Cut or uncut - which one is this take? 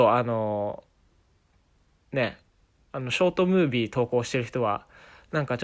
uncut